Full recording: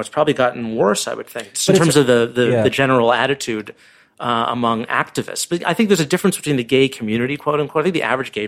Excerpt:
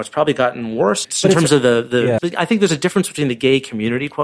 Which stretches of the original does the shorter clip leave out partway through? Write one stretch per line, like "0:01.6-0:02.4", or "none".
0:01.0-0:01.5
0:02.6-0:05.5